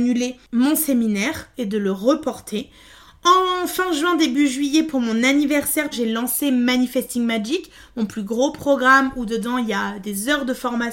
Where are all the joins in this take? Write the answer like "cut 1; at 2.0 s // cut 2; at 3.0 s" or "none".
cut 1; at 5.9 s